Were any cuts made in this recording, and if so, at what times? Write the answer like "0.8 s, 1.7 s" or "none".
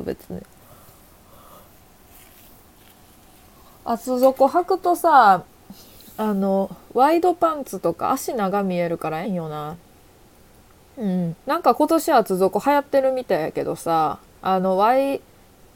9.2 s, 11.4 s